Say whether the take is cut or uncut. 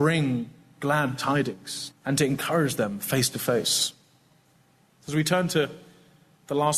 cut